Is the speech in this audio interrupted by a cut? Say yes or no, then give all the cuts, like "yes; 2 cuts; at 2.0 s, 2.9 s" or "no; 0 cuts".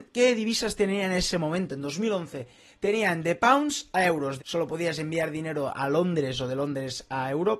yes; 1 cut; at 4.4 s